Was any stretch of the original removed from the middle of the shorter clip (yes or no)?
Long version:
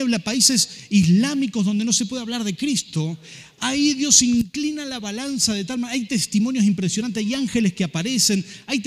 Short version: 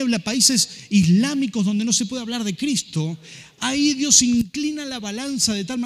no